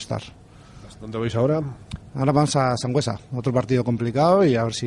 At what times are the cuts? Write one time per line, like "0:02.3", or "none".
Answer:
0:00.9